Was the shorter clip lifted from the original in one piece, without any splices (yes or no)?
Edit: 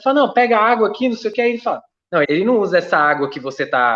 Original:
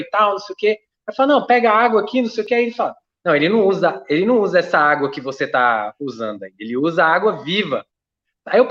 no